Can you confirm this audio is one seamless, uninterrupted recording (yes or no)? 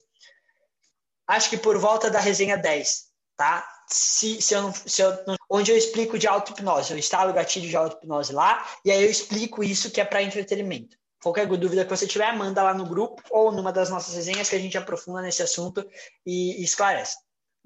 no